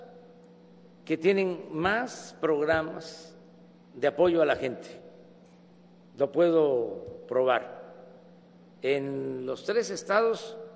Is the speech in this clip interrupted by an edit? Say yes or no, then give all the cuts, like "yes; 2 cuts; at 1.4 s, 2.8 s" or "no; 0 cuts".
no; 0 cuts